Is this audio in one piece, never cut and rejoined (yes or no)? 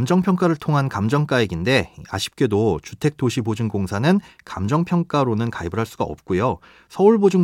yes